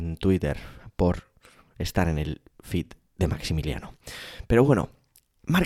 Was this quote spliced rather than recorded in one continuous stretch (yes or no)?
no